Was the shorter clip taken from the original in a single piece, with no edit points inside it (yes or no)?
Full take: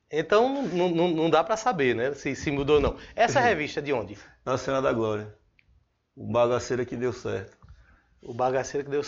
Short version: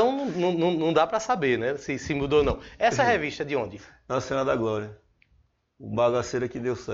yes